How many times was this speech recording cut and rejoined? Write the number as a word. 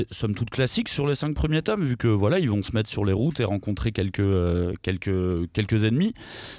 zero